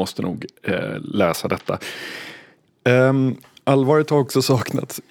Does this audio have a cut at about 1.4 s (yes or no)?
no